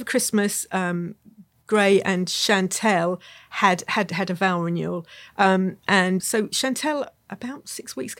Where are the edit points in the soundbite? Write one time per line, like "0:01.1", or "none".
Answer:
0:06.2